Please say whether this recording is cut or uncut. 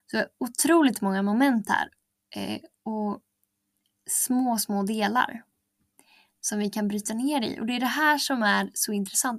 uncut